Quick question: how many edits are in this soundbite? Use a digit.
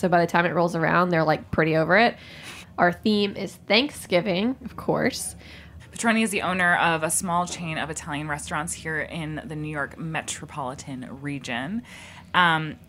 2